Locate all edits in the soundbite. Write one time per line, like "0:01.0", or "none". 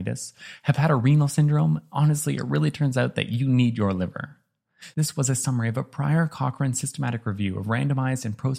0:04.9